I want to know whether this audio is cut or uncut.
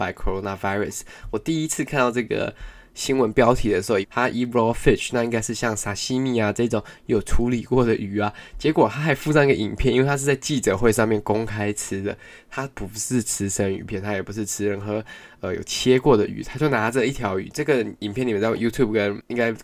cut